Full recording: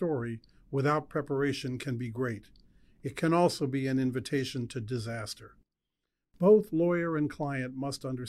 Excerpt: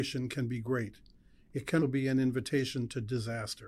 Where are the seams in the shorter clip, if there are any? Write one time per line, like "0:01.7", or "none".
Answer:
0:01.8